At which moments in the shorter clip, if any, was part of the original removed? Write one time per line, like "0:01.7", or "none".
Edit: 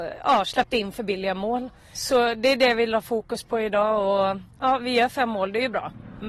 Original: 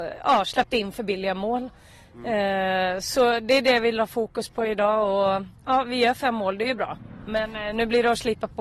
0:02.0